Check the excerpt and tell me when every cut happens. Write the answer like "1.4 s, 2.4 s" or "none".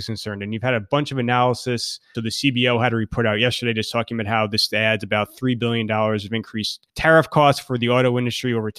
2.1 s, 6.9 s